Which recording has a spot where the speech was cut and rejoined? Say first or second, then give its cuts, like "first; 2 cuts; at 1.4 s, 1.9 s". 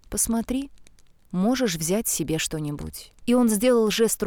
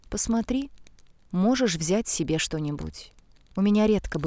first; 1 cut; at 3.2 s